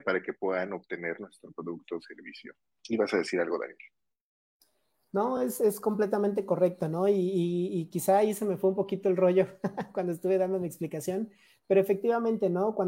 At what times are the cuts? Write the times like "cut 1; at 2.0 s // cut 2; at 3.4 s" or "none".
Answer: none